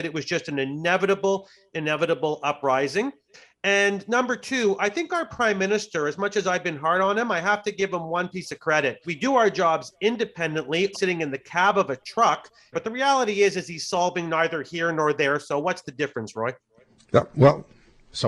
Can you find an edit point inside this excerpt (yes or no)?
yes